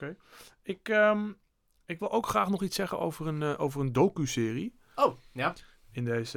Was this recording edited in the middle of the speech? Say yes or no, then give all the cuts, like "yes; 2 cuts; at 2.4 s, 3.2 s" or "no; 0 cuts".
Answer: no; 0 cuts